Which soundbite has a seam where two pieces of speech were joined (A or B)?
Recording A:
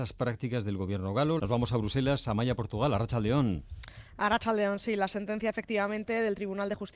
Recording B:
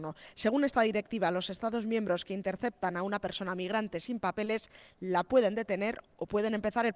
A